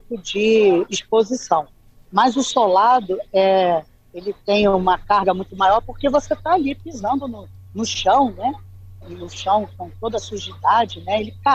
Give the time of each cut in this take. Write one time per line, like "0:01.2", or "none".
0:09.0